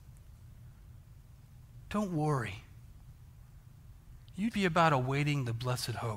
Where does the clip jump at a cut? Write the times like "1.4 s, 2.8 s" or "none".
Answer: 4.5 s